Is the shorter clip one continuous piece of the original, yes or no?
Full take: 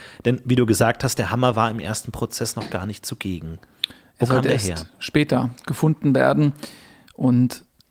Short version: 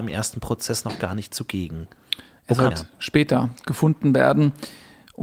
no